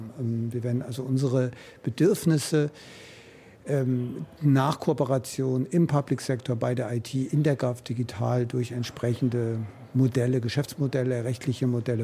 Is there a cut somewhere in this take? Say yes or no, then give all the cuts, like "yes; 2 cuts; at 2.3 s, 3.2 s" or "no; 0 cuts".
no; 0 cuts